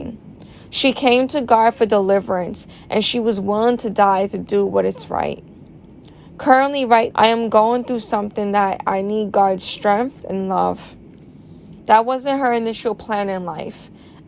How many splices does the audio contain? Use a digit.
3